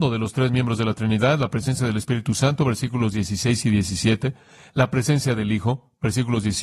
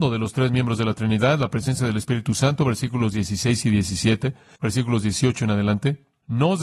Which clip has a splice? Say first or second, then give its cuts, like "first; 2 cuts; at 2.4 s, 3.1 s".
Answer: second; 1 cut; at 4.6 s